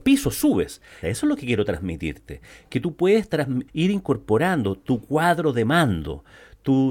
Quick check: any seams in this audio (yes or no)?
yes